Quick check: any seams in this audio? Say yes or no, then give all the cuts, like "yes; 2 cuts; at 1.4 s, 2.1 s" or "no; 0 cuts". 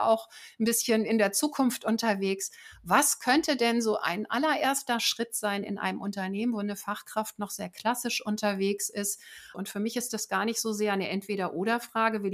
yes; 1 cut; at 9.5 s